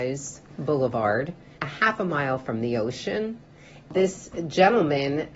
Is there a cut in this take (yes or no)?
yes